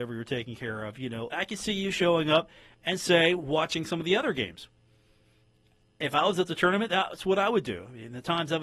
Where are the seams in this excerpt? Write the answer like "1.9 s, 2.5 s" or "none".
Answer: 1.3 s